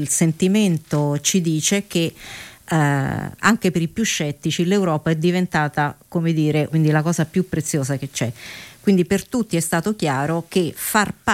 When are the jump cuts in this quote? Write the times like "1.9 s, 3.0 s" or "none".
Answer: 6.7 s